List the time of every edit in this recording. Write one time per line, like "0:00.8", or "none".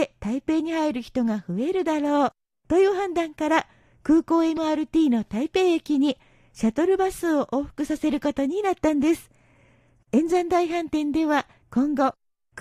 0:10.0